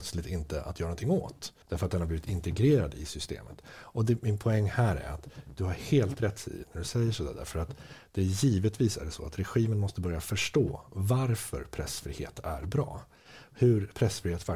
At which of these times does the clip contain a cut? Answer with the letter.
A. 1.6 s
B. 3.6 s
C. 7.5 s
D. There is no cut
A